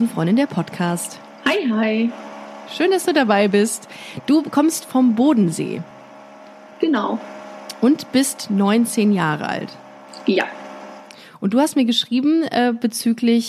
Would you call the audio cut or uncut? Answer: uncut